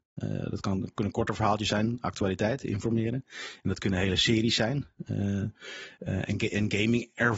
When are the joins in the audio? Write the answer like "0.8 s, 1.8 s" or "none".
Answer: none